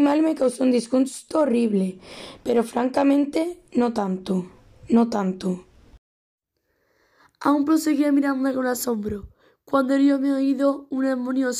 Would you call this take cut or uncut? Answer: uncut